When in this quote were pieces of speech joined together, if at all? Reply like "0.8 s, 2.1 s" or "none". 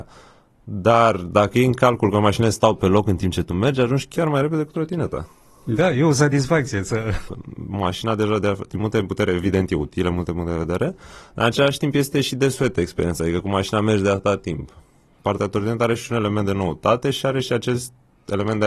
7.3 s